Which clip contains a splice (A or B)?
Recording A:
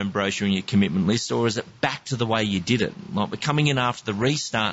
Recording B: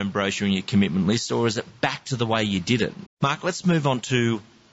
B